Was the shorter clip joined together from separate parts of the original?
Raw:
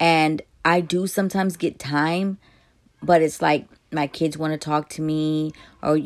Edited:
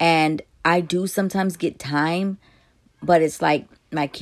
no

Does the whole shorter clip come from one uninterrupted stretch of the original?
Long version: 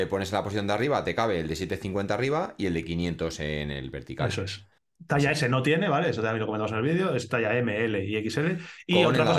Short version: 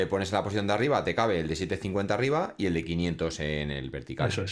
yes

